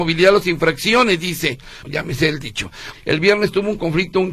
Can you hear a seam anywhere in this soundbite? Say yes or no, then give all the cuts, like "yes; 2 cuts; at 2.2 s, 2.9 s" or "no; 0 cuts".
yes; 2 cuts; at 1.8 s, 2.9 s